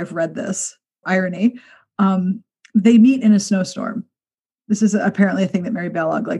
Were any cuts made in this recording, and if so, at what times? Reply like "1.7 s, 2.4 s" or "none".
1.0 s